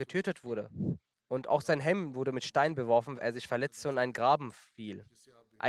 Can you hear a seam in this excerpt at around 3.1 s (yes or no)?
yes